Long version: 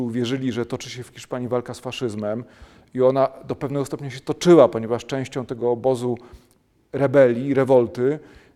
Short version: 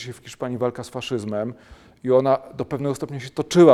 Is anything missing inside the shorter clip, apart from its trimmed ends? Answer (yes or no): no